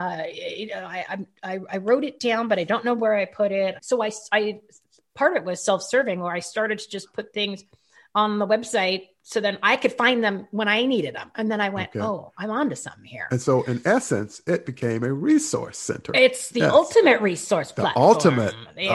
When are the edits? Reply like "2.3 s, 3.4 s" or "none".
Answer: 3.8 s